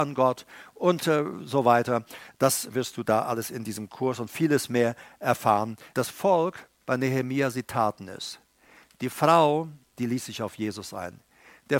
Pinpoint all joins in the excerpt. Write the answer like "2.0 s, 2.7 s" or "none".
2.7 s, 5.9 s, 9.9 s